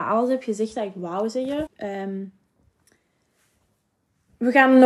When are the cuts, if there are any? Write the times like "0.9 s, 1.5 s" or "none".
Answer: 1.7 s